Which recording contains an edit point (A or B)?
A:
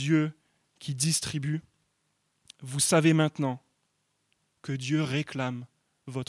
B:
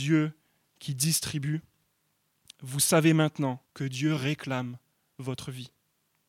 B